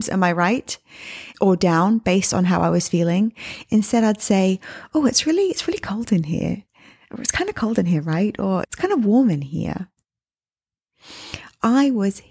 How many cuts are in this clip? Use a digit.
2